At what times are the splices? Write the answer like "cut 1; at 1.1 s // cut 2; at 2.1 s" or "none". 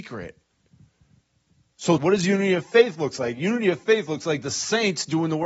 cut 1; at 2.0 s